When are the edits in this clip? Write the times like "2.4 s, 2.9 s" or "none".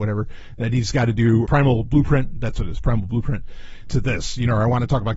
1.5 s, 3.9 s